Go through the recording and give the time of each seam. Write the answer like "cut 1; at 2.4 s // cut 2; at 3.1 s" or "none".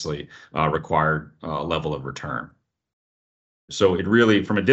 cut 1; at 3.7 s

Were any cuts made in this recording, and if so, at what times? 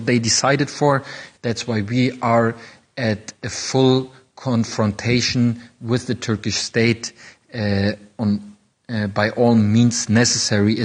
cut 1; at 1.3 s // cut 2; at 8.1 s

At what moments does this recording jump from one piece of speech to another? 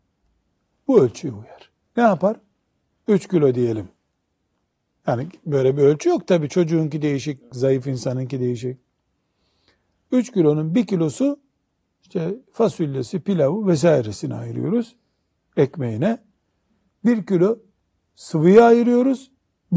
cut 1; at 2.9 s // cut 2; at 7.5 s

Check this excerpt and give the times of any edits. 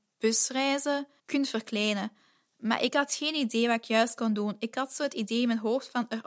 none

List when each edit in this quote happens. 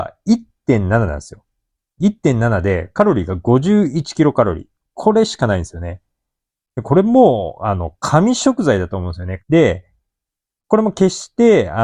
cut 1; at 9.4 s

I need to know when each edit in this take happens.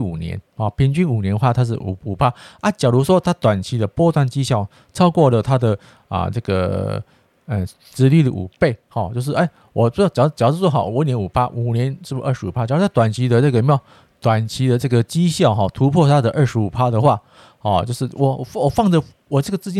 none

